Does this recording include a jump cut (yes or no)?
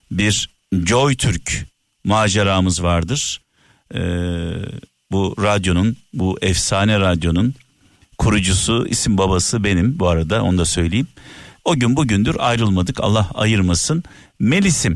yes